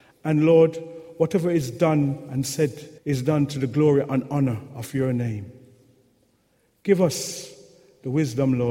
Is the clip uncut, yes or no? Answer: no